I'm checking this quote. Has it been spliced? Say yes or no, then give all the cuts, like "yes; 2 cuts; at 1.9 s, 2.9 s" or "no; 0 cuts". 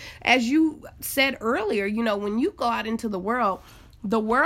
no; 0 cuts